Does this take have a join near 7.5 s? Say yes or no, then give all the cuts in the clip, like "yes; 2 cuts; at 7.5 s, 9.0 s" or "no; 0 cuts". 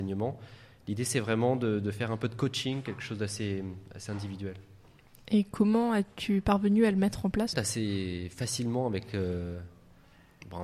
yes; 1 cut; at 7.5 s